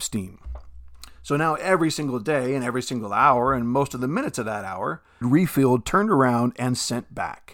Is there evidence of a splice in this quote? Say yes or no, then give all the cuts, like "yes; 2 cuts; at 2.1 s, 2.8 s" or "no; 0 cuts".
yes; 1 cut; at 5.2 s